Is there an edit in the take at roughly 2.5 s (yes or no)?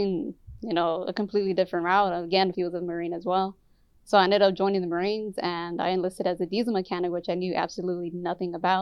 yes